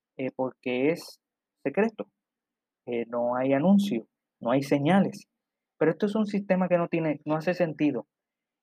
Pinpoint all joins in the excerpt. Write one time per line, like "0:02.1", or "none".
0:05.7